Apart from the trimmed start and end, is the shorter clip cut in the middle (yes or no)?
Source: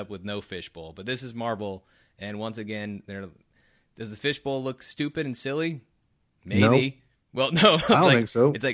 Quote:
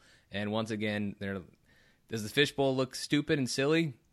no